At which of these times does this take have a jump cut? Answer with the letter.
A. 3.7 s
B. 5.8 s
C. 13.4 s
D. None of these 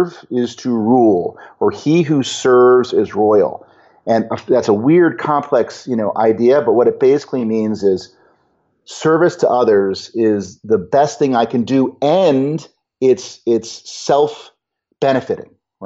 D